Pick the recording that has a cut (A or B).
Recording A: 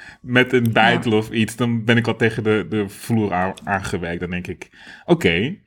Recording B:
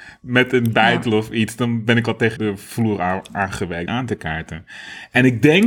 B